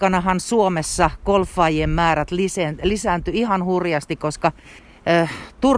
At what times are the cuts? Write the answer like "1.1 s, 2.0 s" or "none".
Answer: none

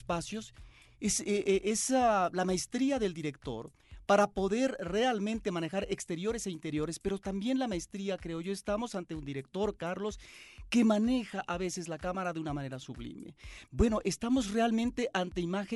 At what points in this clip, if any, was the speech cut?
13.6 s

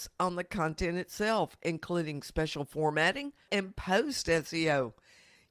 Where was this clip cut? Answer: 3.5 s

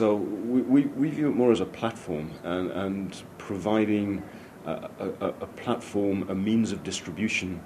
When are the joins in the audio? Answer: none

